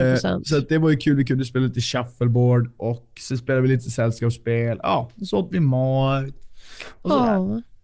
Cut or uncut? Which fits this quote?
uncut